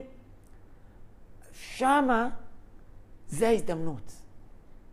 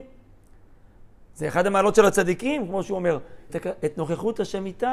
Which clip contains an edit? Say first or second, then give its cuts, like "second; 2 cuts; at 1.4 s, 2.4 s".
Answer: second; 2 cuts; at 1.3 s, 3.5 s